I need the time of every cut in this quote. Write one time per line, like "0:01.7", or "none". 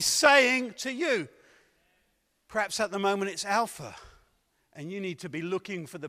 none